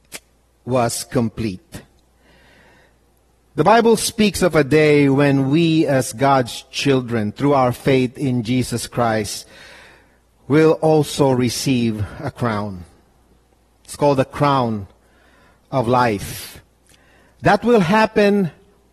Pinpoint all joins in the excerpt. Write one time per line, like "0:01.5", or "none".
none